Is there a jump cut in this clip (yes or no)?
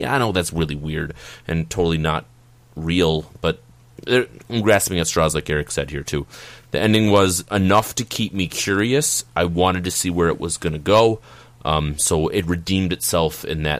no